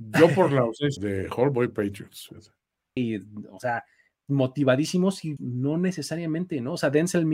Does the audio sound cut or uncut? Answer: cut